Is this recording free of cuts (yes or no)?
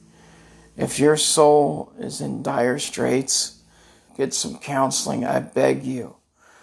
no